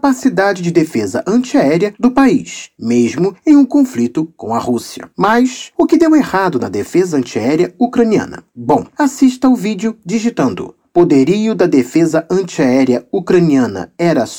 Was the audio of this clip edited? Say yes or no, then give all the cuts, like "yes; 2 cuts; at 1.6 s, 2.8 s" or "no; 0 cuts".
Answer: yes; 1 cut; at 8.9 s